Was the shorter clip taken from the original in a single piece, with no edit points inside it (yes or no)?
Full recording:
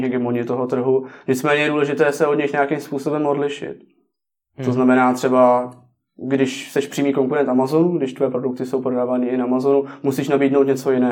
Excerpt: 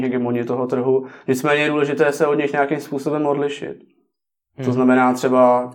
yes